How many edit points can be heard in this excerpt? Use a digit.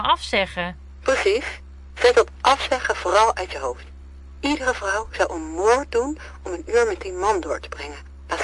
0